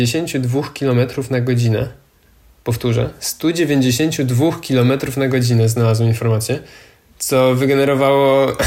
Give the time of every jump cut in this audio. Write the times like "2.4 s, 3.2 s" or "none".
none